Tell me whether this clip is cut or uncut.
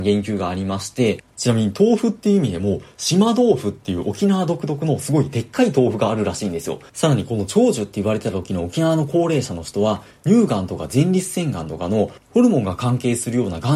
cut